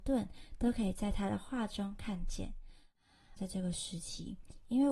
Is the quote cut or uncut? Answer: cut